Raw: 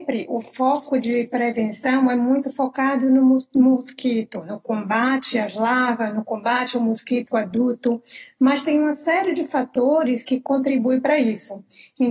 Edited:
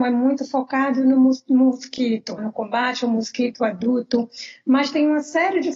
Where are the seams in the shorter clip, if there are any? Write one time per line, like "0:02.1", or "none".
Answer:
0:02.4

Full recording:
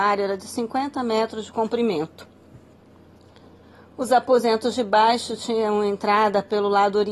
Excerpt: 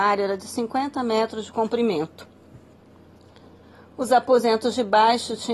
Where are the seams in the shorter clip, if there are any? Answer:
none

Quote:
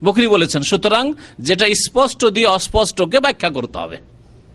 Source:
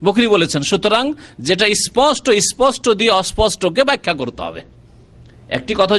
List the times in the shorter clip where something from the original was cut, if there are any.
0:01.9

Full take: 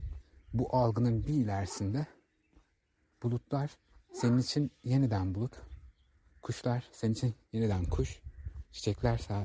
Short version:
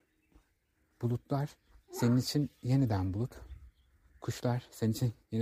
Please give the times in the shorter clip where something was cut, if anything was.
none

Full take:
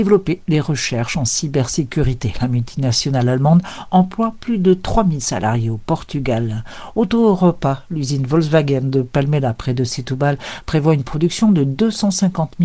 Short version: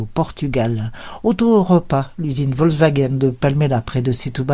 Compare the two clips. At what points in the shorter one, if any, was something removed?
none

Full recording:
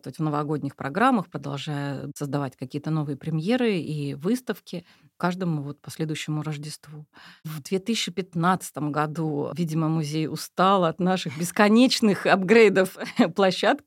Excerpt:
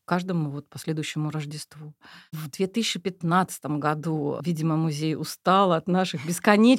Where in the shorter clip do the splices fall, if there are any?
none

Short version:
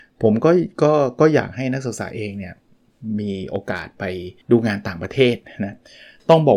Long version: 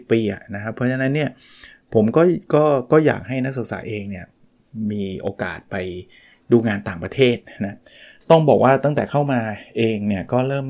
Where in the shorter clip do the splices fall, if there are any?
0:04.4

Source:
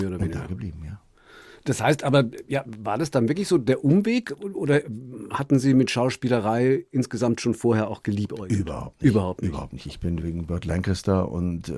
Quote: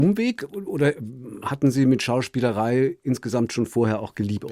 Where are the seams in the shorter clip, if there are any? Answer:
none

